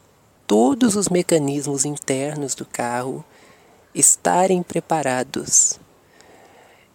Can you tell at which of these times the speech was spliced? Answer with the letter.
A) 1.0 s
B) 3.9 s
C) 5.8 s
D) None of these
D